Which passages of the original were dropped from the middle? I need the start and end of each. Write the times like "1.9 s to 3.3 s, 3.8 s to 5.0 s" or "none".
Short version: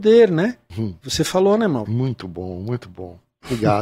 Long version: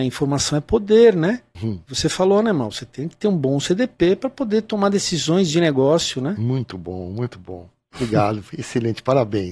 2.7 s to 6.4 s